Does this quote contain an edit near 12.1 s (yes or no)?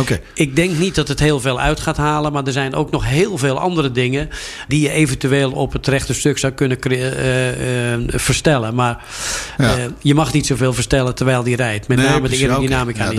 no